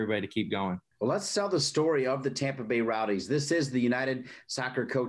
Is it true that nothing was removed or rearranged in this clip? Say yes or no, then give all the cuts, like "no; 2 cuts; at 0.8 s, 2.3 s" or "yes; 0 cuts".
yes; 0 cuts